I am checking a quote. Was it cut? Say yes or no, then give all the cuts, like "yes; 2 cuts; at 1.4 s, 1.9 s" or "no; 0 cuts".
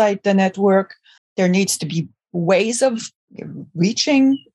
yes; 1 cut; at 1.2 s